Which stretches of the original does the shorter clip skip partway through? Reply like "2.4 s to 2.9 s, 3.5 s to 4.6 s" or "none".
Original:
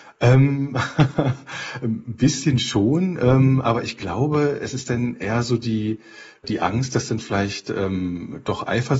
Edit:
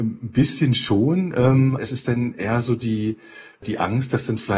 3.6 s to 4.6 s

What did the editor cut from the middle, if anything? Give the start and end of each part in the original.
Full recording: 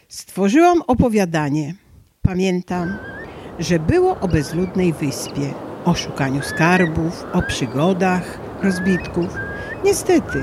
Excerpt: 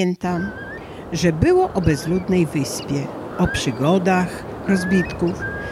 5.8 s to 7.3 s

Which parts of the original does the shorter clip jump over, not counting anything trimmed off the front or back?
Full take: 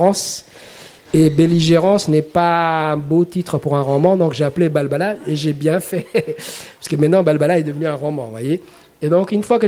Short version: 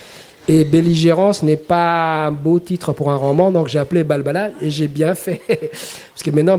none

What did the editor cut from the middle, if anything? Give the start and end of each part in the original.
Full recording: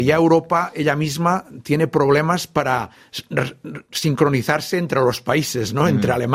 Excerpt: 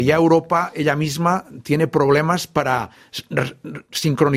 none

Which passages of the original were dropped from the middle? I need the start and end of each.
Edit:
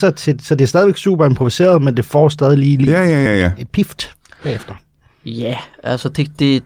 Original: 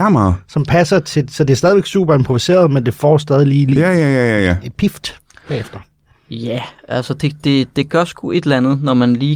4.1 s to 4.3 s

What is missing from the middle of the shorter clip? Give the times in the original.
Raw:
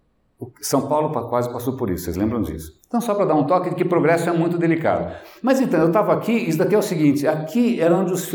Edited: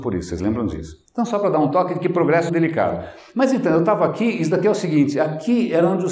4.2 s to 4.6 s

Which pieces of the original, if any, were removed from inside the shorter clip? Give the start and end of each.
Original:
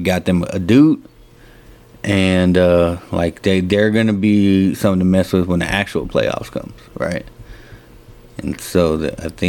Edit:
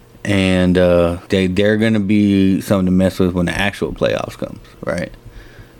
3.1 s to 3.4 s

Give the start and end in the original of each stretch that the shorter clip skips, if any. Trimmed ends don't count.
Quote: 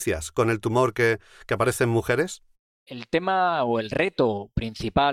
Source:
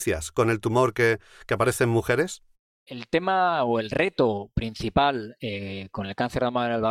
none

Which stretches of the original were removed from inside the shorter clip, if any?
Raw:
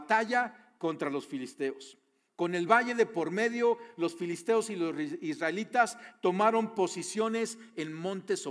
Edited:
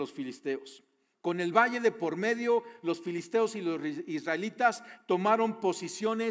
none

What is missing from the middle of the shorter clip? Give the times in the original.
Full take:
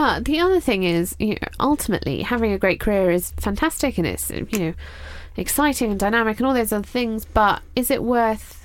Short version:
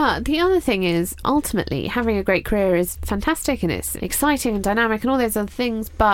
1.2 s to 1.5 s, 4.3 s to 5.3 s

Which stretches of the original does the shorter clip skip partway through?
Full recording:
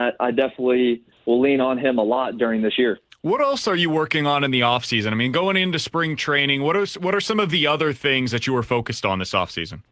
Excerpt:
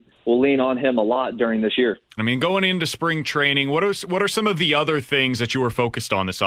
3.2 s to 5.1 s

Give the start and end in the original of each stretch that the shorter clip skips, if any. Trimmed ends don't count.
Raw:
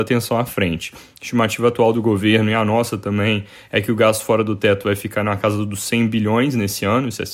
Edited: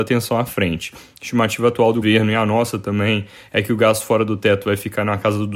2.0 s to 2.2 s

